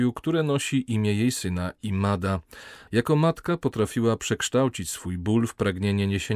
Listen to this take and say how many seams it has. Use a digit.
1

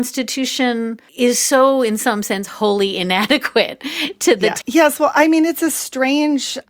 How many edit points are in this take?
2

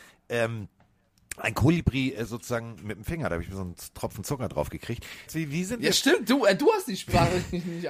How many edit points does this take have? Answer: 2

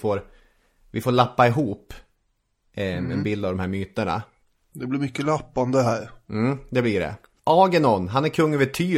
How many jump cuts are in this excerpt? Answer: 0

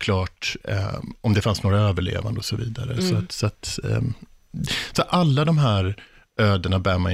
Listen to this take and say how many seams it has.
0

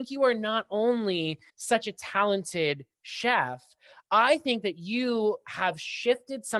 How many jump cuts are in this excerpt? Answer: 1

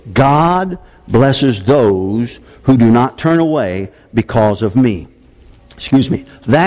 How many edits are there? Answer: 1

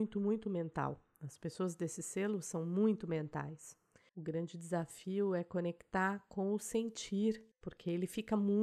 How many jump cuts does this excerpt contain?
1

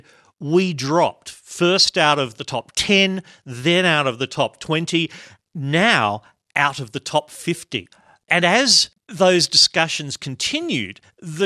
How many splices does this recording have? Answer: 0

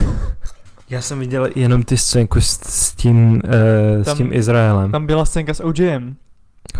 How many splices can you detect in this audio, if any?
0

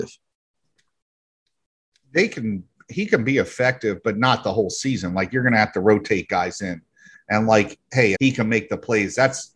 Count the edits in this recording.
2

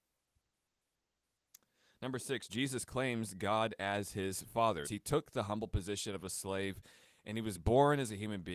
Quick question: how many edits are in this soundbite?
1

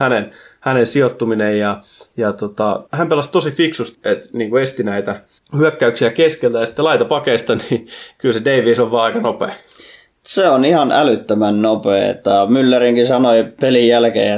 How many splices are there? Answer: 3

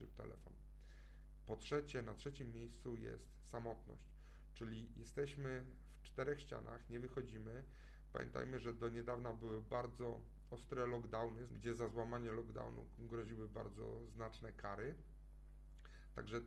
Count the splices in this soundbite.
1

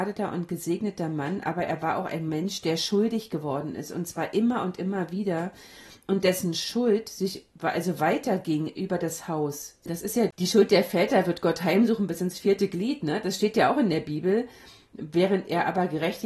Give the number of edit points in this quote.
1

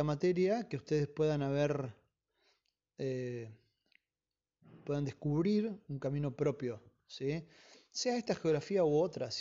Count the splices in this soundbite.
0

